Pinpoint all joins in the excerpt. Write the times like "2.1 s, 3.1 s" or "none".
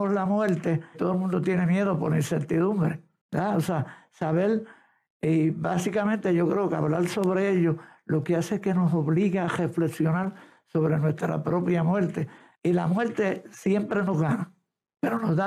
0.9 s, 12.5 s